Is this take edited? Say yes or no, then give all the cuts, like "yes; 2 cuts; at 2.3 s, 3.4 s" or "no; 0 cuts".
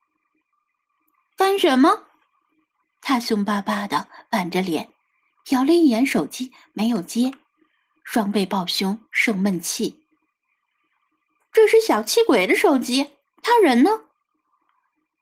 no; 0 cuts